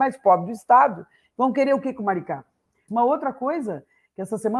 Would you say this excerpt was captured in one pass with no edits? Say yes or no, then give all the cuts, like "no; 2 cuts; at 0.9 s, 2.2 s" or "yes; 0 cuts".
no; 1 cut; at 2.9 s